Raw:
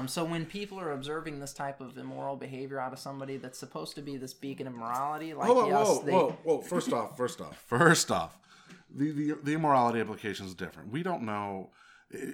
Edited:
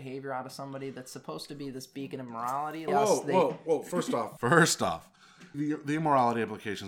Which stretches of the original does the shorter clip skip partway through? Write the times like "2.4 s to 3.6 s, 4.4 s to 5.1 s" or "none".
5.3 s to 5.7 s, 7.2 s to 7.7 s, 8.8 s to 9.1 s